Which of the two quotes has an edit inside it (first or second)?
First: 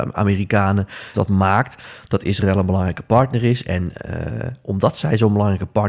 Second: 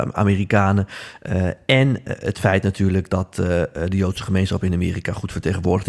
first